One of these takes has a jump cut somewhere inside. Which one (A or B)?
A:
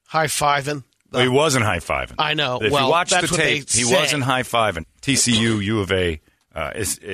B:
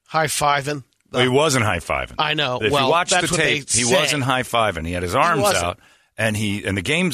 A